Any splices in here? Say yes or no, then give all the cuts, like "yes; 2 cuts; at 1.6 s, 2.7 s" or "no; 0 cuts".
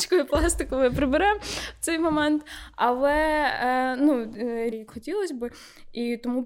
yes; 1 cut; at 4.7 s